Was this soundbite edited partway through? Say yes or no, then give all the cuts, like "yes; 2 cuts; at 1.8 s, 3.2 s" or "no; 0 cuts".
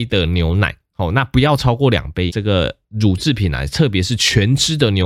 yes; 1 cut; at 2.3 s